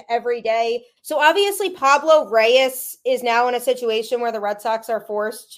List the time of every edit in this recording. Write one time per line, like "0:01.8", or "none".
0:01.0